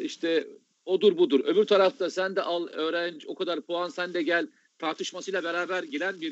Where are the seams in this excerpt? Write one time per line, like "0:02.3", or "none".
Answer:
none